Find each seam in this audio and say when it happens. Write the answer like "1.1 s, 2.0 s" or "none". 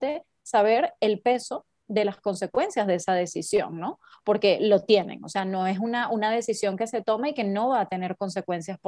none